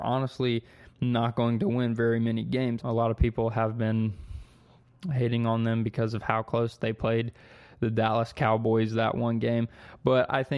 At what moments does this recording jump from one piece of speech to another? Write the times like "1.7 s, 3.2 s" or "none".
2.8 s